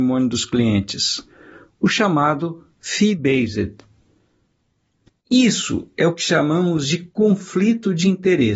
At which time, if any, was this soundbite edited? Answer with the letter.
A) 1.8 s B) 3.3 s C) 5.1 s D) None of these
C